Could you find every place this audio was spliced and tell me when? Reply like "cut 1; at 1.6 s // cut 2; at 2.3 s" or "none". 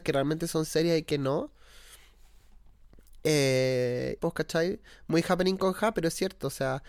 cut 1; at 4.2 s